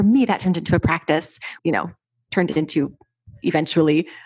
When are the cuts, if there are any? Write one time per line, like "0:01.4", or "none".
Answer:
0:01.6